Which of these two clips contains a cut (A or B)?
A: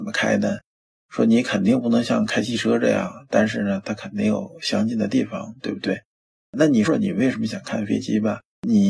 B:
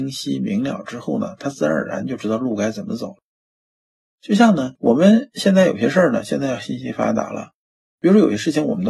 A